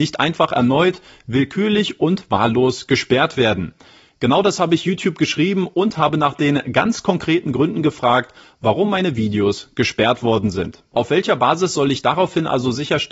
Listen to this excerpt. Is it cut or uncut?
cut